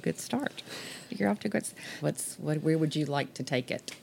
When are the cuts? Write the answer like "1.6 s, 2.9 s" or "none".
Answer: 2.0 s